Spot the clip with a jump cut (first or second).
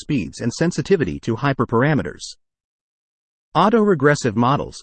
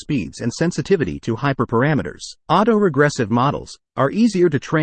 second